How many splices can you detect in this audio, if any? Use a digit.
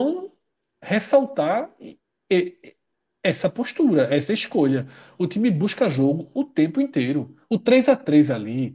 0